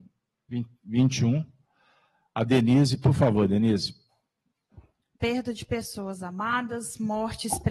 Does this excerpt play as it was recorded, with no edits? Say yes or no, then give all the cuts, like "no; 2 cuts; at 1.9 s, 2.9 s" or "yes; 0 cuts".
no; 1 cut; at 5.2 s